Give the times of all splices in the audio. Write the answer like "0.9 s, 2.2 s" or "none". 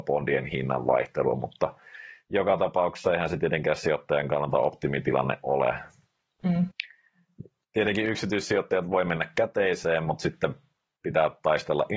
none